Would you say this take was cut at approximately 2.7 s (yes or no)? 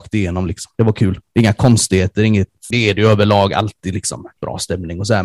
yes